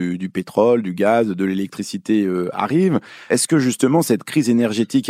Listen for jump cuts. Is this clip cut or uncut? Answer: cut